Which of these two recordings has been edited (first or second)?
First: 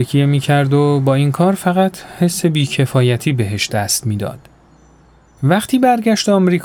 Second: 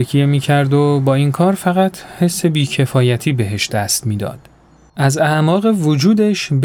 second